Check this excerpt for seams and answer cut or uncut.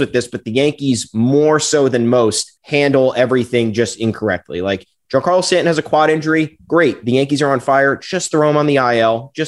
cut